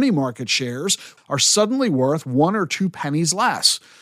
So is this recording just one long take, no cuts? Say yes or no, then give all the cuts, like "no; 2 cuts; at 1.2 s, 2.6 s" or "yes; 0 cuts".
no; 1 cut; at 1.2 s